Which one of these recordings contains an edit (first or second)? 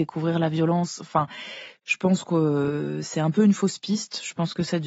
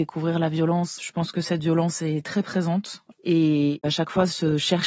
second